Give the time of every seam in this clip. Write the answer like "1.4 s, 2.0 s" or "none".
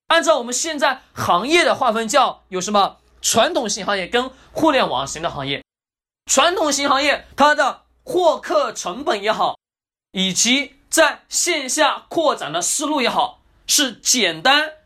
7.3 s